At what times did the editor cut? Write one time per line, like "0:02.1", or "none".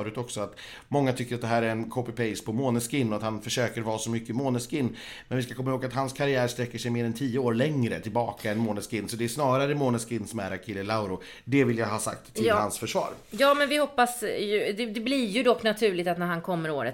none